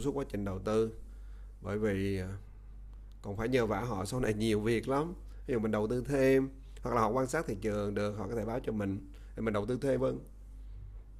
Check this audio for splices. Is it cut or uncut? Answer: cut